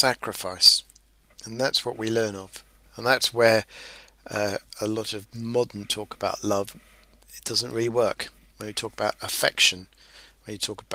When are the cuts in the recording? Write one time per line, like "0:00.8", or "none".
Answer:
0:01.2